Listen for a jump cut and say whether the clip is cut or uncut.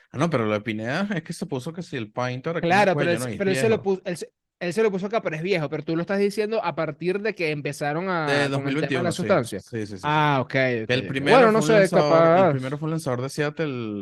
uncut